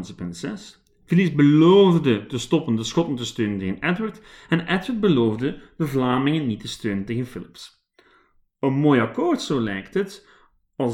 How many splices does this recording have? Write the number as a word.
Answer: zero